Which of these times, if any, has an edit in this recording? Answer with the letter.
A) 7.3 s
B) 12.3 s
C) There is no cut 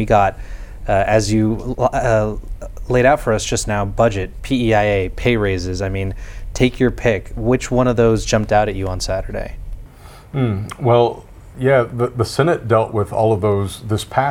C